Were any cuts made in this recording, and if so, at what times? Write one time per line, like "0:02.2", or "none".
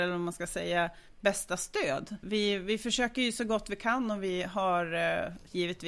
0:02.2